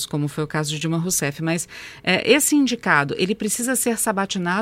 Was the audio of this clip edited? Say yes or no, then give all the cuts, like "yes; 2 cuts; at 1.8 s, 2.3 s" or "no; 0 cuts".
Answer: no; 0 cuts